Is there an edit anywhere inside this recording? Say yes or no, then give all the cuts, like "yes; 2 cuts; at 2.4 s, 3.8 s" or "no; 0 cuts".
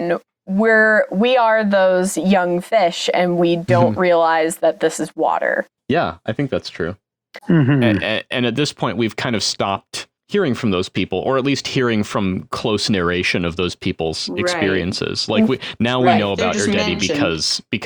yes; 1 cut; at 7.4 s